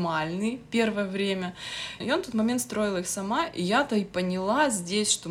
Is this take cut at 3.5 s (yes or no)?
no